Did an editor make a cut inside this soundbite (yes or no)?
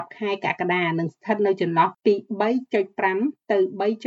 no